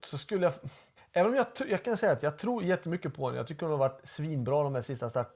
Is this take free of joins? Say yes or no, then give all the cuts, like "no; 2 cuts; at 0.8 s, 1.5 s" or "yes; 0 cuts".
yes; 0 cuts